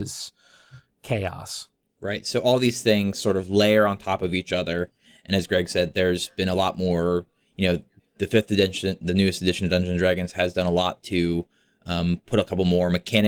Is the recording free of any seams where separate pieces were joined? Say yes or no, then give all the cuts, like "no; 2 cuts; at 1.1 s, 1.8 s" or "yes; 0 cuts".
yes; 0 cuts